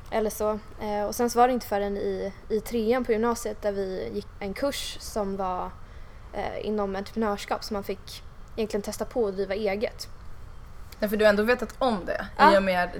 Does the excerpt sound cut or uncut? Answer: cut